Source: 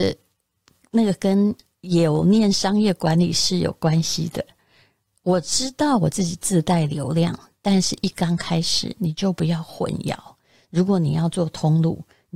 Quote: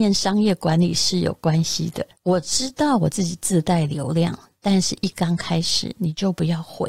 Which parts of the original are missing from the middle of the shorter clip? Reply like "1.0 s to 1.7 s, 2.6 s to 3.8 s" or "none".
4.5 s to 5.2 s